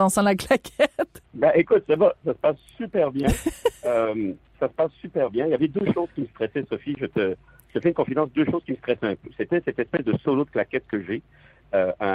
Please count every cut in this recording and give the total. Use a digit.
1